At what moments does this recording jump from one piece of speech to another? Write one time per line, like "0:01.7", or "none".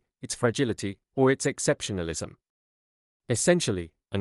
none